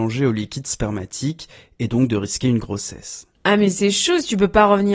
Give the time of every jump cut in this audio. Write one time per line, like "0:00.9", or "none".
none